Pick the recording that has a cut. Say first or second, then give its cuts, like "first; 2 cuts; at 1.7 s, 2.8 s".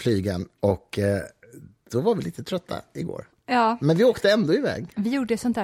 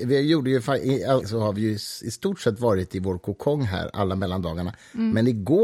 second; 1 cut; at 1.2 s